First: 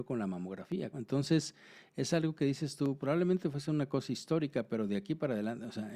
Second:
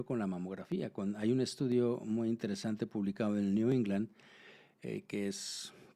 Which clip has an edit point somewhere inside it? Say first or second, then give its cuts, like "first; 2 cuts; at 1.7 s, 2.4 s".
first; 2 cuts; at 0.9 s, 3.0 s